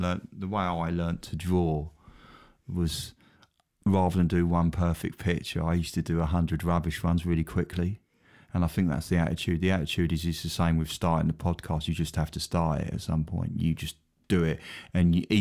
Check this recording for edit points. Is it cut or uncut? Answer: uncut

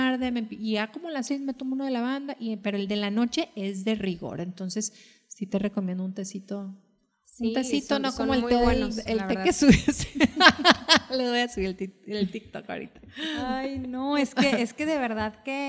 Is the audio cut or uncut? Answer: uncut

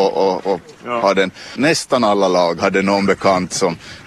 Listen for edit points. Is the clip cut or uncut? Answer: cut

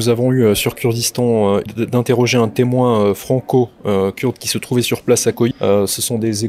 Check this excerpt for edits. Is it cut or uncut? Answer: cut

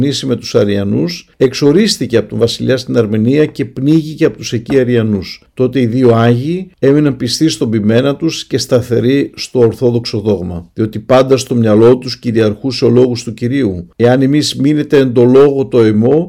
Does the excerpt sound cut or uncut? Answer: uncut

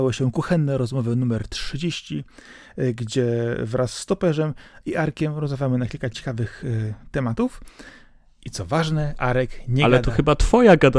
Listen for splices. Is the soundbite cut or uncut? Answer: uncut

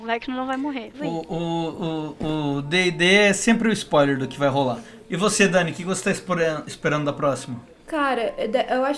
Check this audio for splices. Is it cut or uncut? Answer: uncut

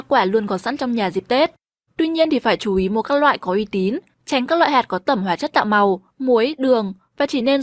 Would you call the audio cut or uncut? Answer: cut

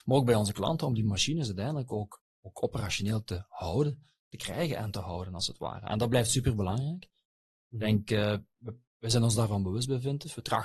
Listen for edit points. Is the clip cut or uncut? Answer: uncut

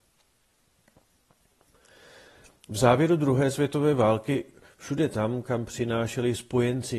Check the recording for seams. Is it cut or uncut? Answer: uncut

